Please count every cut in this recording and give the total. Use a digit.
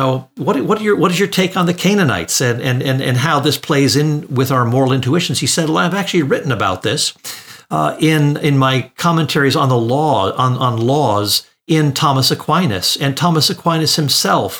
0